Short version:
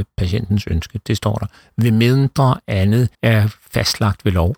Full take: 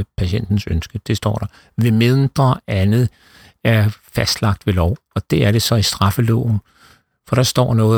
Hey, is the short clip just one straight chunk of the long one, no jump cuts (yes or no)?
no